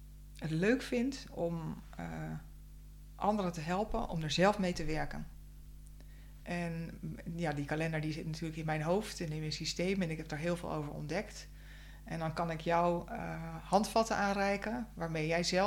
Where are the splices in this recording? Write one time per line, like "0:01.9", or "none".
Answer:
0:06.4